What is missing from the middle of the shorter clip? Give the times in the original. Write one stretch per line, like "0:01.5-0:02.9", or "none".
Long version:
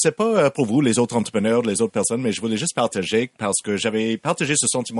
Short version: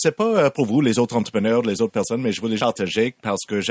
0:02.6-0:02.7